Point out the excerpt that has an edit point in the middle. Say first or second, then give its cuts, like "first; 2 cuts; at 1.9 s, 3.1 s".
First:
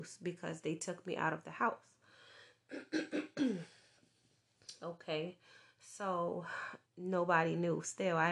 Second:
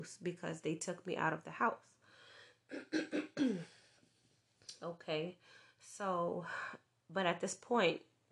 first; 1 cut; at 6.9 s